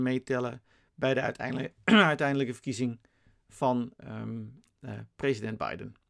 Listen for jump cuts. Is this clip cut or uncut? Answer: cut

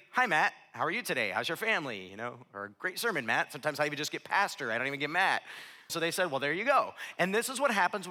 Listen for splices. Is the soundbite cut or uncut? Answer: cut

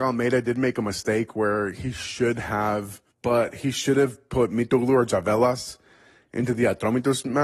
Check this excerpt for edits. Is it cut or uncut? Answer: cut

